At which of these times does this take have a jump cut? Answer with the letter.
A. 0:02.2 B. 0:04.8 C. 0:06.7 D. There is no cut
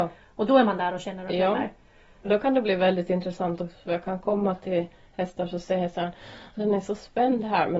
A